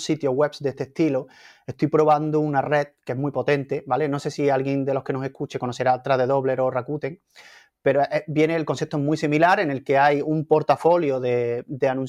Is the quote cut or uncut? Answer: uncut